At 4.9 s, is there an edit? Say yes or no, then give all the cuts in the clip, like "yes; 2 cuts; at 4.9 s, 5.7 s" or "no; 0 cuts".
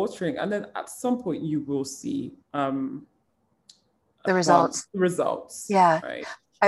yes; 2 cuts; at 2.4 s, 4.9 s